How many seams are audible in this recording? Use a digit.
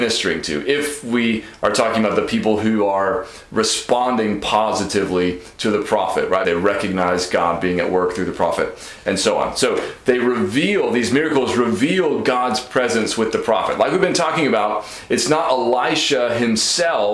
1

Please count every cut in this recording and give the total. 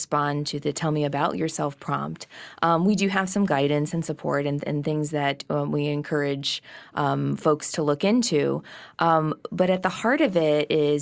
0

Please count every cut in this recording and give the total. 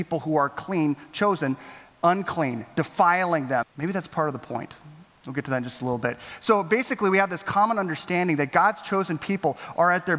1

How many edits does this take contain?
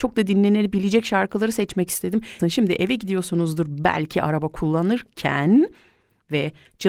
1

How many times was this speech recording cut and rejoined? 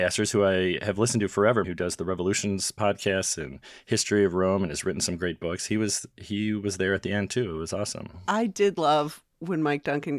1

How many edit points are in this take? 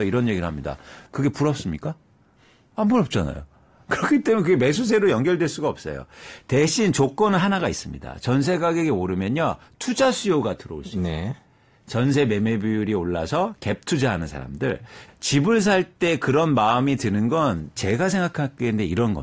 2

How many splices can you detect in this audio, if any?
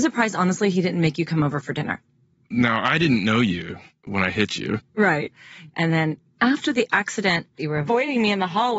0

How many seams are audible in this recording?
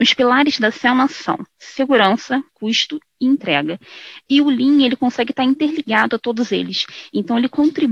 1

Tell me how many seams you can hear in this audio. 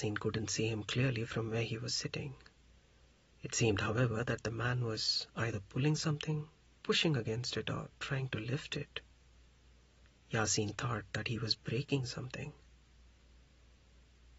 0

